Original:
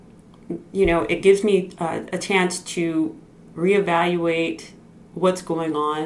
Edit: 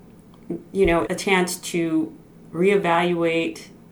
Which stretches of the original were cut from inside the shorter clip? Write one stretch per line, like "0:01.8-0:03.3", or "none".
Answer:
0:01.1-0:02.1